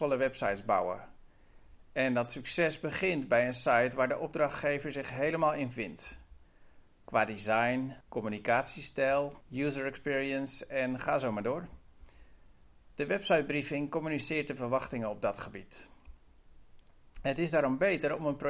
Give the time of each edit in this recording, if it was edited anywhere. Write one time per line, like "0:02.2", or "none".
0:08.0
0:09.4